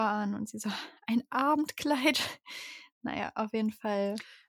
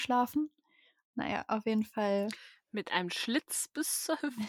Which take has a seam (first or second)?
second